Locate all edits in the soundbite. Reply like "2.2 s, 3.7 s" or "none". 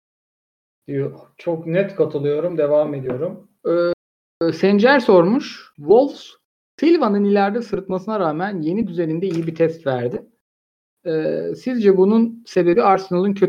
3.6 s, 5.7 s